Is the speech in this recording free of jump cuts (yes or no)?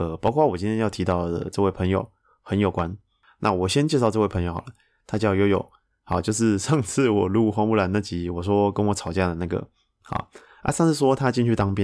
yes